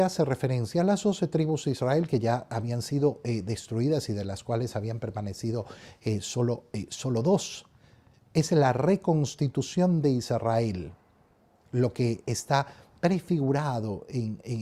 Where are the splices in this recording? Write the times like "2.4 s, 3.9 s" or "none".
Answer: none